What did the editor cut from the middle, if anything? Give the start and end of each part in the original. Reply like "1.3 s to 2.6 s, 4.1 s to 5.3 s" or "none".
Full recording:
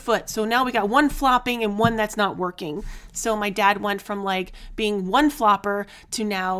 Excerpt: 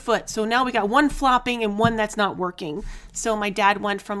none